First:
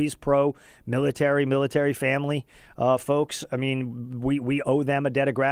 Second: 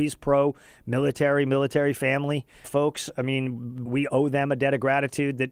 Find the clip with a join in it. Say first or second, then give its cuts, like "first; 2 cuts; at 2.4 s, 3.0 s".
second; 2 cuts; at 2.6 s, 3.9 s